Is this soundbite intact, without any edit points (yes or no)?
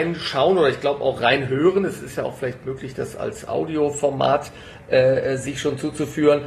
yes